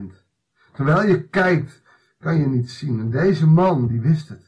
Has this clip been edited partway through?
no; 0 cuts

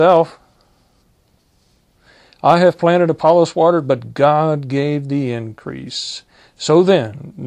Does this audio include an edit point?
no; 0 cuts

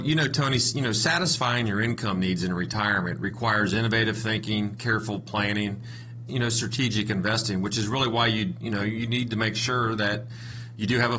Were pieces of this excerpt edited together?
yes; 1 cut; at 6.3 s

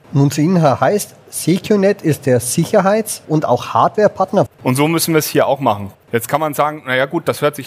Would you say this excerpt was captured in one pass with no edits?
no; 2 cuts; at 4.5 s, 5.9 s

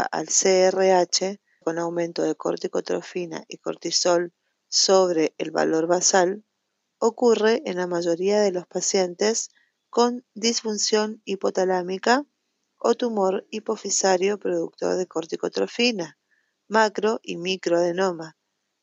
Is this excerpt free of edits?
no; 1 cut; at 1.6 s

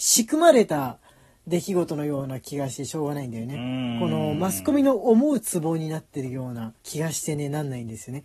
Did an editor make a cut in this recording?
yes; 1 cut; at 6.8 s

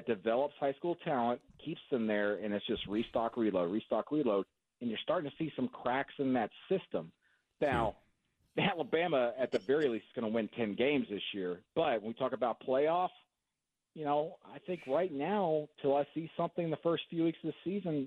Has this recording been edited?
no; 0 cuts

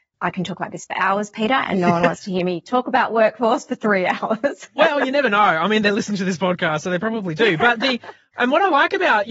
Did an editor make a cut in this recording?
no; 0 cuts

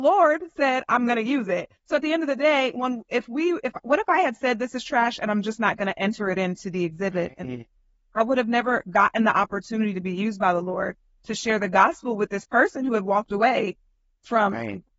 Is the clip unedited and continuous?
yes; 0 cuts

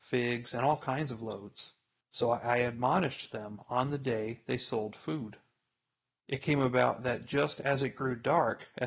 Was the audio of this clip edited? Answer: yes; 2 cuts; at 2.0 s, 6.2 s

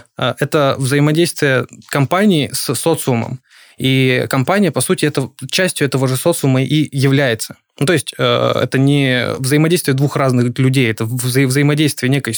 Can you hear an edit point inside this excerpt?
no; 0 cuts

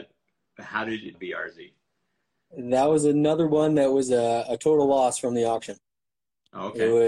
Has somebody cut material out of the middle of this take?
yes; 1 cut; at 1.1 s

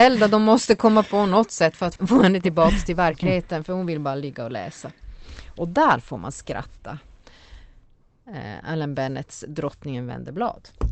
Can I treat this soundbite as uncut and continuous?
no; 1 cut; at 2.0 s

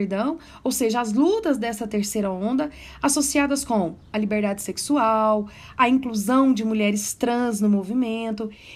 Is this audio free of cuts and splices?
yes; 0 cuts

